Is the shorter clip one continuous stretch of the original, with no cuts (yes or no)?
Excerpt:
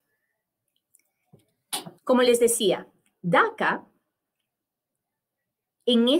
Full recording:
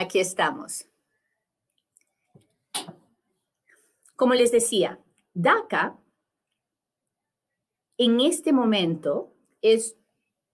no